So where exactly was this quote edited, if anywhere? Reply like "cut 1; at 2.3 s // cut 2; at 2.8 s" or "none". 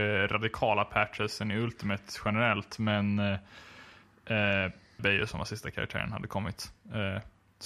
cut 1; at 5.0 s